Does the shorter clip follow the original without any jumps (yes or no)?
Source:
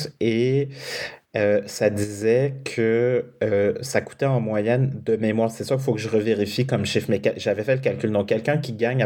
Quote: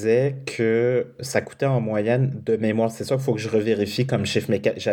no